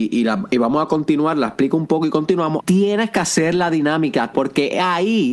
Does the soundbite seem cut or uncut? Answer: cut